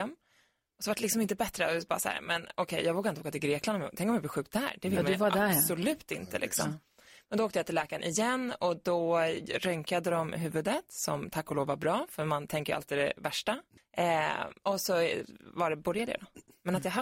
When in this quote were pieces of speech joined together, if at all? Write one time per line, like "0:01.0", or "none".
0:13.8